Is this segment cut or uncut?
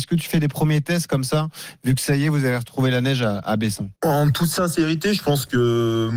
cut